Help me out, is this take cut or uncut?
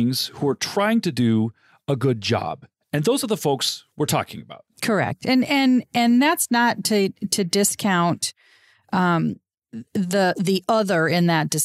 uncut